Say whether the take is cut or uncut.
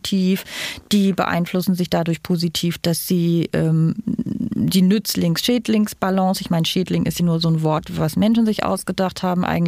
cut